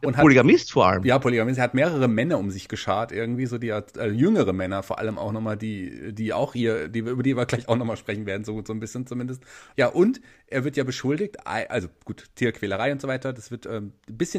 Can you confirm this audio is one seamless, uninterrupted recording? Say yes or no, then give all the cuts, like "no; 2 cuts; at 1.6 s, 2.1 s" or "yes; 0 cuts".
yes; 0 cuts